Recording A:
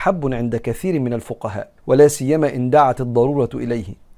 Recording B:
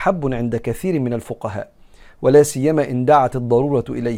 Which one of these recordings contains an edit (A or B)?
A